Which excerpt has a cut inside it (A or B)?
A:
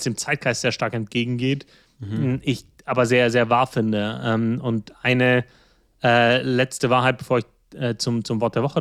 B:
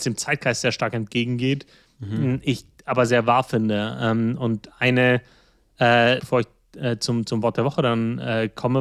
B